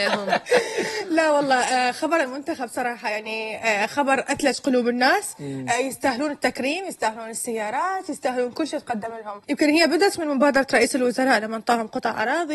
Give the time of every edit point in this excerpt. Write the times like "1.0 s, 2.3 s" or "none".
9.4 s